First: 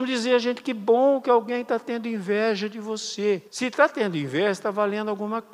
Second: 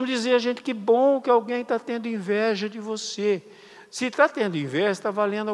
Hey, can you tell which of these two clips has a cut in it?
first; 1 cut; at 3.5 s

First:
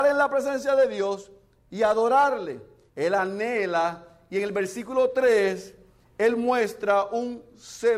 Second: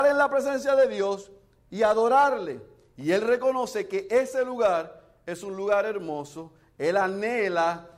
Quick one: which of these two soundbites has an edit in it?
first; 1 cut; at 2.9 s

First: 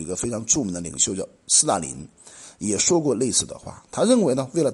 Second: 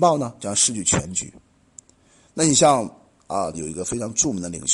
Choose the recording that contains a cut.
second; 1 cut; at 3.5 s

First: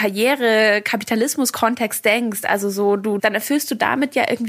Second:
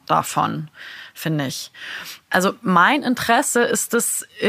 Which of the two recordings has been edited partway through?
first; 1 cut; at 3.2 s

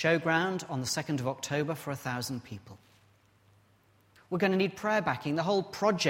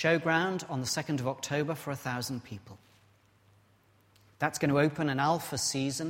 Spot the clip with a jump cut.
first; 1 cut; at 4.2 s

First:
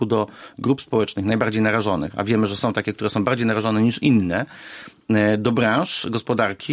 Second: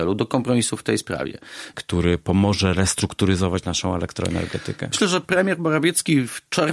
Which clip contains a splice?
second; 1 cut; at 1.7 s

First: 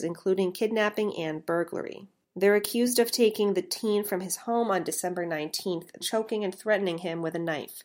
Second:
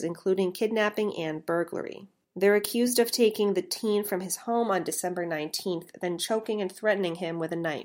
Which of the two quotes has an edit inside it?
first; 1 cut; at 6.0 s

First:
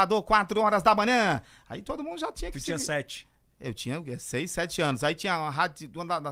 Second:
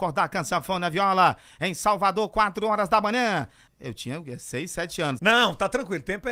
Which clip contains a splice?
second; 2 cuts; at 3.7 s, 5.2 s

